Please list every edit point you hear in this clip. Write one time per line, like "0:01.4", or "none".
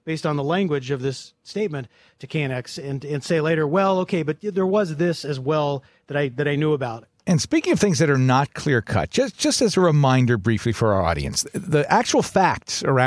none

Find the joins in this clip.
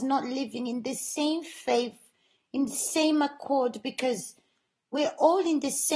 none

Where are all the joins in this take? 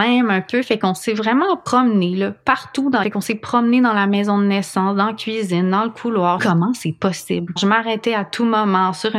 0:03.0
0:06.4
0:07.6

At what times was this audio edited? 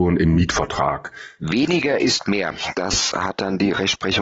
0:02.7

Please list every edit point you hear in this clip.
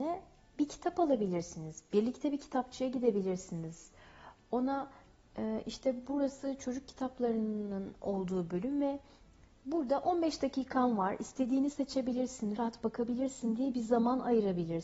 0:12.6

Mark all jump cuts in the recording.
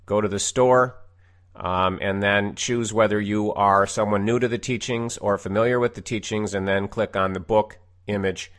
none

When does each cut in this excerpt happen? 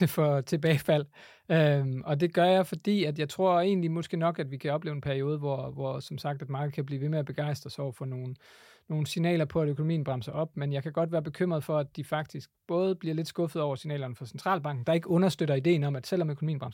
none

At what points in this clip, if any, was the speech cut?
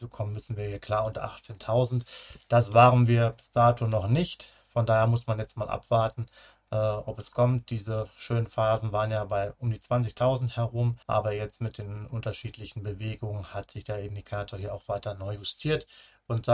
0:11.0

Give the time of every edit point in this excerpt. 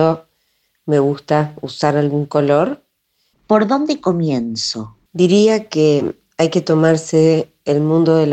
0:03.3
0:05.1

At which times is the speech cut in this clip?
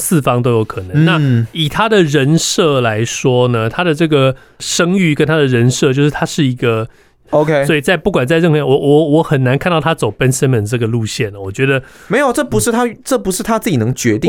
0:07.3

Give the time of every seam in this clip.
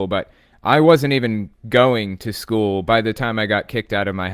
none

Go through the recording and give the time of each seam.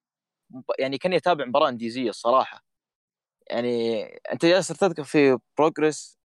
none

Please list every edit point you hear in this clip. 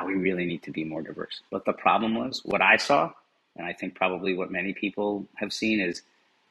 0:01.5

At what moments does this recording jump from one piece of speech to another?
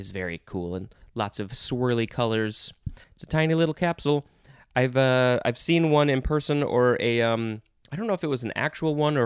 0:03.0

